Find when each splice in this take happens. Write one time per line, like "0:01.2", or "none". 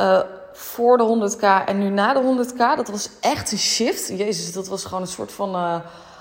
none